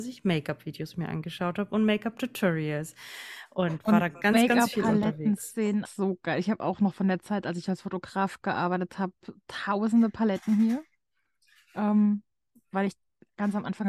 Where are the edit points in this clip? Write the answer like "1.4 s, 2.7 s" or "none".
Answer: 5.9 s